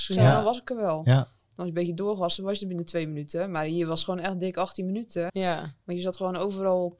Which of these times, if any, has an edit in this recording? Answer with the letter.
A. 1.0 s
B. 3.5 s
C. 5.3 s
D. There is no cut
C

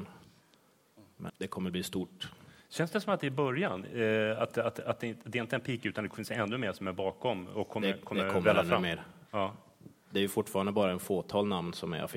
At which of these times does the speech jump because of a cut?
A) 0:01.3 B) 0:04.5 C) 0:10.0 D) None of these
A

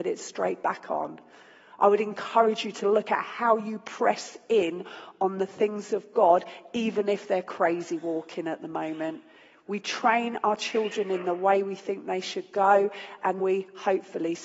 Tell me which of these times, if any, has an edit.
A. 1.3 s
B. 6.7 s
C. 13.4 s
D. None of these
C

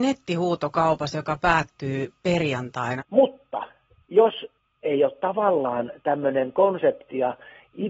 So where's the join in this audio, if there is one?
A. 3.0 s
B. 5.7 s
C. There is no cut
A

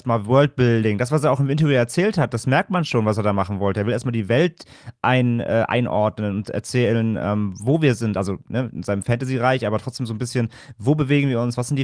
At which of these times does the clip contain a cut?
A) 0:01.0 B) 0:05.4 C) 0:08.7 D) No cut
D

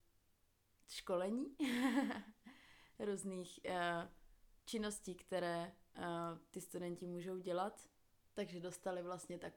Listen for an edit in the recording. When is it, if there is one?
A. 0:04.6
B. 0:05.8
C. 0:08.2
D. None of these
C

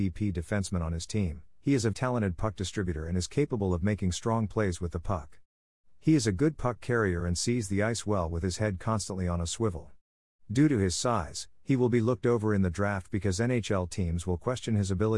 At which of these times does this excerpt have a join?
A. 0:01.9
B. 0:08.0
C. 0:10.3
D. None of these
A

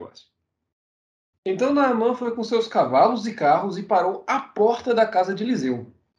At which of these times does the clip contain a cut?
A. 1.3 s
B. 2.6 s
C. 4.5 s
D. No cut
A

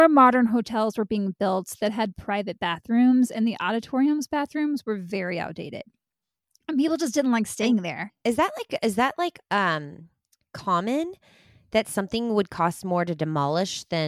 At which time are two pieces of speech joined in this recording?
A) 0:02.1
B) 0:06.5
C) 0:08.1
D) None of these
C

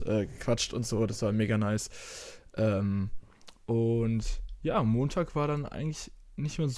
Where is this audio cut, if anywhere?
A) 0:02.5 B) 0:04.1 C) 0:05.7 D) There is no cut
D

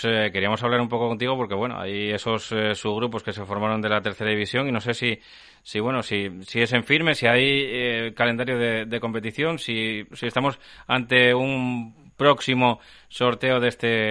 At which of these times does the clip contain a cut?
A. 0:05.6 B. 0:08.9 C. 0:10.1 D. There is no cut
C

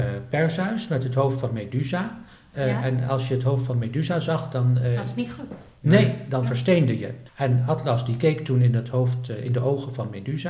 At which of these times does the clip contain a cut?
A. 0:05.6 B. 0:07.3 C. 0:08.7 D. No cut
B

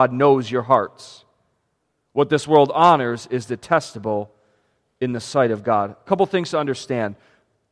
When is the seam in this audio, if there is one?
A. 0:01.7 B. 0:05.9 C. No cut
C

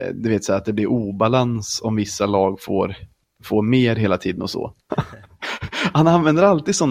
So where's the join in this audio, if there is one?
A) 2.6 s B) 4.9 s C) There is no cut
B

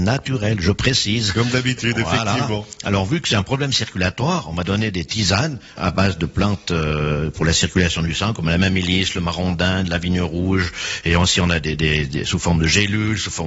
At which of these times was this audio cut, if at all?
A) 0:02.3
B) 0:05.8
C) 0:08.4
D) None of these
B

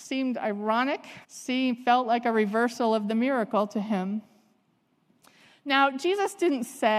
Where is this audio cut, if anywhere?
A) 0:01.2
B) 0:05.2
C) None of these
A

